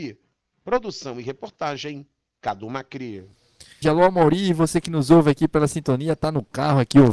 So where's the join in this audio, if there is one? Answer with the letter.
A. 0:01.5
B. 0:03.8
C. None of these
B